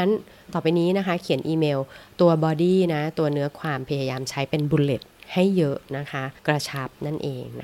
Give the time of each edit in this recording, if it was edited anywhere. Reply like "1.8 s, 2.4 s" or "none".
6.4 s

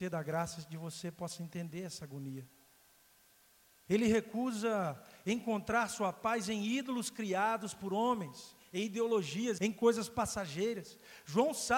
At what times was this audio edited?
3.9 s, 9.6 s

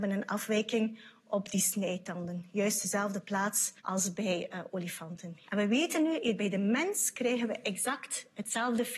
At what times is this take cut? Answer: 3.8 s, 5.4 s

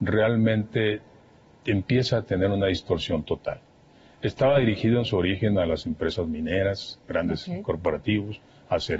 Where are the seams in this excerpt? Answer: none

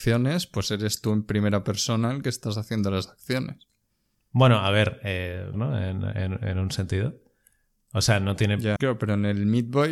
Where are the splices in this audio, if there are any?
5.5 s, 8.8 s

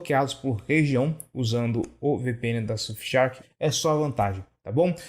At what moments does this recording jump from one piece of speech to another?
3.4 s

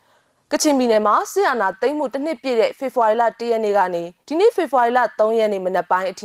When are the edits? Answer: 4.2 s

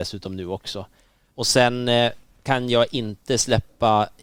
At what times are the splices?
1.3 s

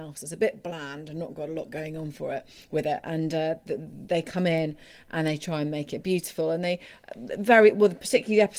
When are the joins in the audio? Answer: none

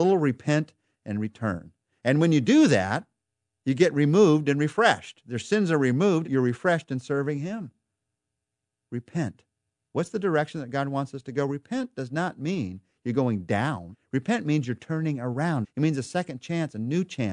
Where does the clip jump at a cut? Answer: 15.6 s

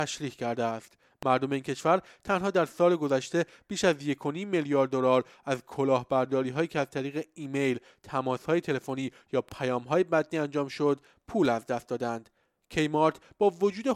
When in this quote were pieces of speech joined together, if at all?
none

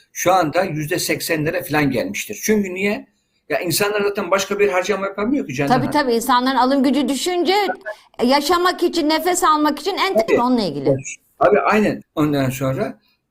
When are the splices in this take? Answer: 10.3 s, 12.0 s

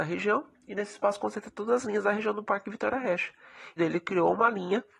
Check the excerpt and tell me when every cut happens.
3.8 s

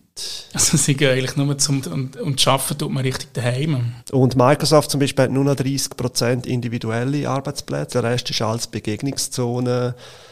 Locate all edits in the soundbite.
1.8 s, 4.0 s, 7.9 s

